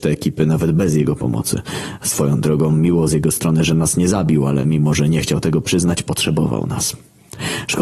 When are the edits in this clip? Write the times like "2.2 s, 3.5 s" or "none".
none